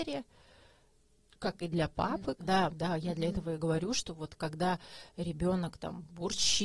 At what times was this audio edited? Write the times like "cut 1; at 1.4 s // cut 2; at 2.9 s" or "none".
cut 1; at 2.4 s